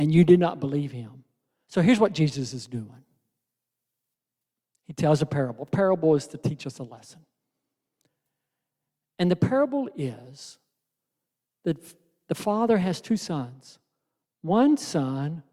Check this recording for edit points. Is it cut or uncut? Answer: cut